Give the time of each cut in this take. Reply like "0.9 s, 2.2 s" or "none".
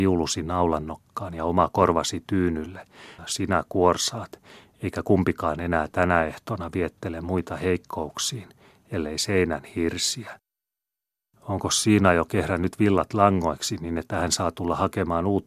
3.2 s